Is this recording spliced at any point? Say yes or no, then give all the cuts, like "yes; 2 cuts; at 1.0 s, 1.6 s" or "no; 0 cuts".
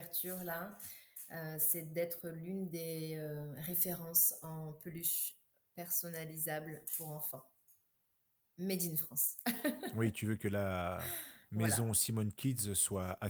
no; 0 cuts